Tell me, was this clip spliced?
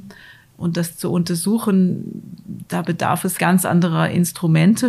yes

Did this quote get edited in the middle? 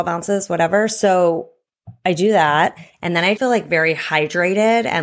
yes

